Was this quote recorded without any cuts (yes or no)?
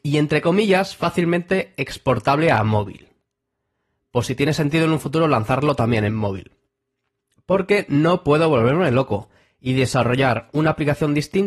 yes